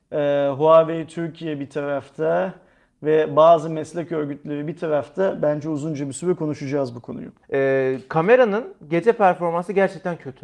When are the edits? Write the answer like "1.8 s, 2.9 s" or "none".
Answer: 7.4 s